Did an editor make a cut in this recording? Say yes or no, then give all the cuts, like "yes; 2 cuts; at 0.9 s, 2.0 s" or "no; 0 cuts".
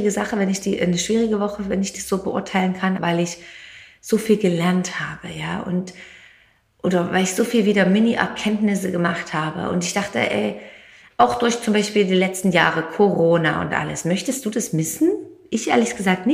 yes; 1 cut; at 3.0 s